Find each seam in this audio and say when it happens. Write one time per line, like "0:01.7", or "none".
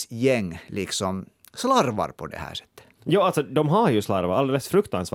none